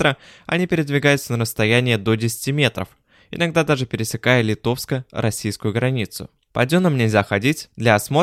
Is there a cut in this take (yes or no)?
no